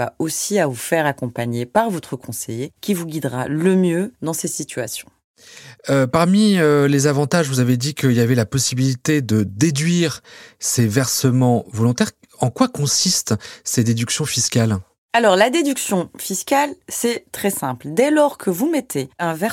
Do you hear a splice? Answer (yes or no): no